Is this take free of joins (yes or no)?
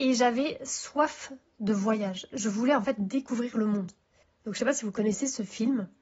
no